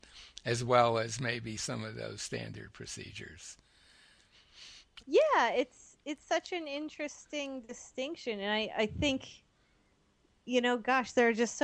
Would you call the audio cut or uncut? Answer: cut